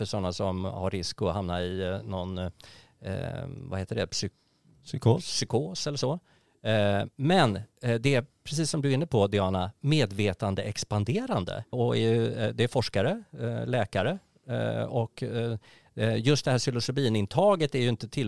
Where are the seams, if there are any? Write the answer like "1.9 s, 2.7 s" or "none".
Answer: 11.7 s